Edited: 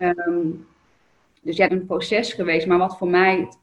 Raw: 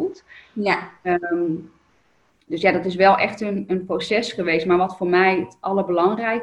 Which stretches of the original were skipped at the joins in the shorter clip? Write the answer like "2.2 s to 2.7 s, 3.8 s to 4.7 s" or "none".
2.7 s to 3.7 s